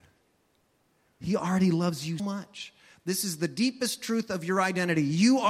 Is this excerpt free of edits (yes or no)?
no